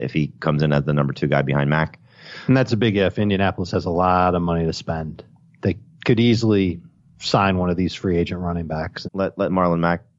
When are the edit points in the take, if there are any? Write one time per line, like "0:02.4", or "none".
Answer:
0:09.0